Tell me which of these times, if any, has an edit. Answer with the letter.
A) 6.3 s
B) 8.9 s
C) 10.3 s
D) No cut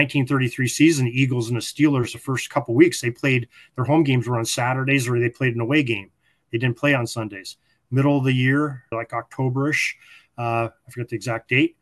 B